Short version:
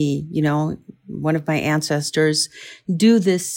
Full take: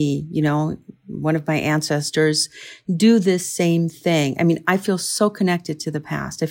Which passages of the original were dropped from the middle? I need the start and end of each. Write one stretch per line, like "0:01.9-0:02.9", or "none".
none